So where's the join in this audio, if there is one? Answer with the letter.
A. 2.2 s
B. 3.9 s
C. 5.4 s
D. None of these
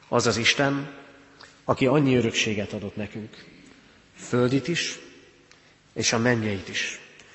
D